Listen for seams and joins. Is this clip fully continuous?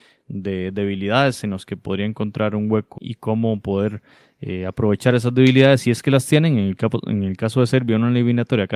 no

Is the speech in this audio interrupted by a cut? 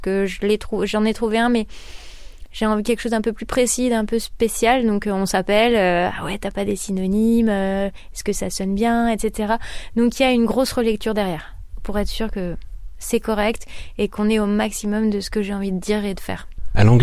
no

